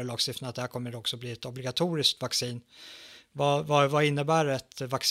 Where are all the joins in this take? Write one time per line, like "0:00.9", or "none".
none